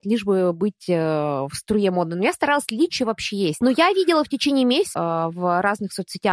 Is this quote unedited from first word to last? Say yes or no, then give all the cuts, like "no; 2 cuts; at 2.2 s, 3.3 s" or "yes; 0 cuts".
no; 2 cuts; at 3.6 s, 4.9 s